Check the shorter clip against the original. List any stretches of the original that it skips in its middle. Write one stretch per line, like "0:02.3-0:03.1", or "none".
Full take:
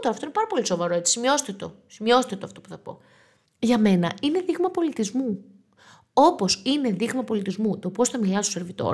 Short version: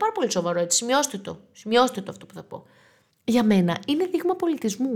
none

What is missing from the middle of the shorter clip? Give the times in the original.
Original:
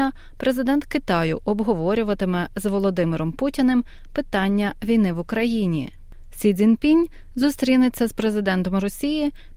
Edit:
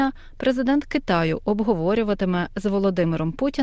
none

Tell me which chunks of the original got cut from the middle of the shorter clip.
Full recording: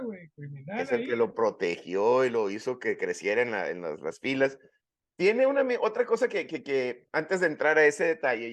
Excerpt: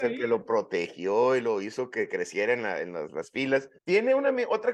0:04.7-0:05.1

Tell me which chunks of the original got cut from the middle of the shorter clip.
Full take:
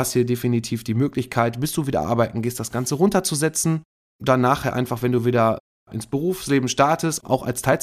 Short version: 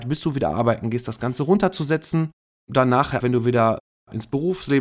0:04.7-0:05.0

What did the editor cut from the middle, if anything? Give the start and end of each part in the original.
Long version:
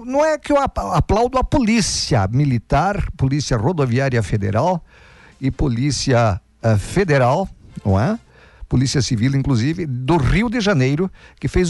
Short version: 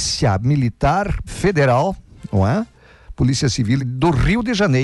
0:03.2-0:06.8
0:09.3-0:09.9

